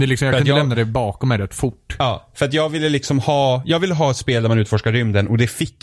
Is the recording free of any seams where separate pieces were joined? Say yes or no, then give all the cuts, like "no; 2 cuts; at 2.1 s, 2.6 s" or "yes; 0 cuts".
yes; 0 cuts